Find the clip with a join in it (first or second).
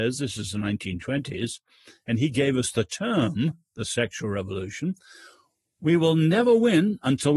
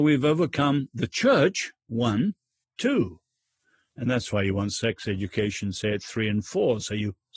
second